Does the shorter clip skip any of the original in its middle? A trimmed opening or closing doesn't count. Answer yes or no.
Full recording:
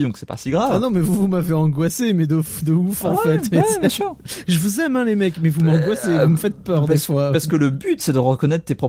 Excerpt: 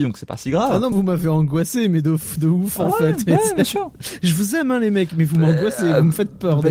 yes